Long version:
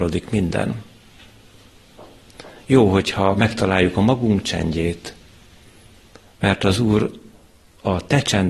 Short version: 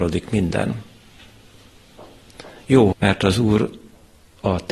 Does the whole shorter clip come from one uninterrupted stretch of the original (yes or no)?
no